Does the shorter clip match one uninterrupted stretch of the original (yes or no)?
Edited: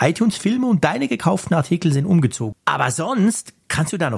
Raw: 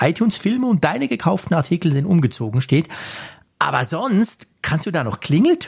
no